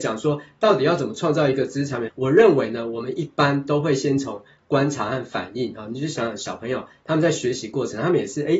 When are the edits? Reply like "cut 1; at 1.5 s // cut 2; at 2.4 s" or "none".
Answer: cut 1; at 2.1 s